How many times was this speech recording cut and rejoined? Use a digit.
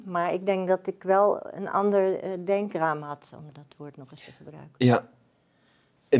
0